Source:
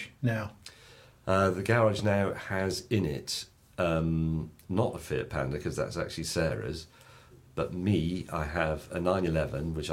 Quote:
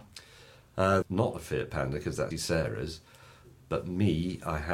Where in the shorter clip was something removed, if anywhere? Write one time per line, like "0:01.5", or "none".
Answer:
0:01.0
0:02.3

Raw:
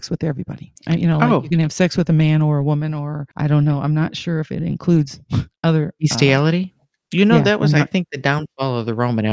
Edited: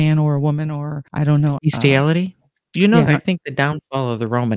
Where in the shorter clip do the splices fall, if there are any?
0:01.6
0:03.1

